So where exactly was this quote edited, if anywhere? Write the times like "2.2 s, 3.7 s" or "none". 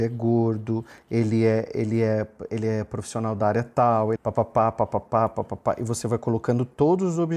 4.2 s